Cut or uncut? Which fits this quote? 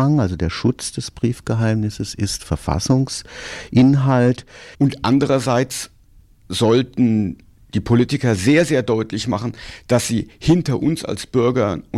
cut